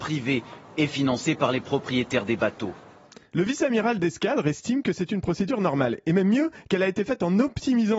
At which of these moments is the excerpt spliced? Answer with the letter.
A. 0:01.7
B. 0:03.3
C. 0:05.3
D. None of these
B